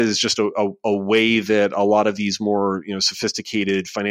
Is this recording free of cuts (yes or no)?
yes